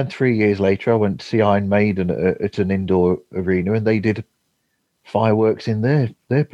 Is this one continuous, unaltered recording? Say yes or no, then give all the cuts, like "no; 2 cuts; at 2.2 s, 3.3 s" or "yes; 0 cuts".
yes; 0 cuts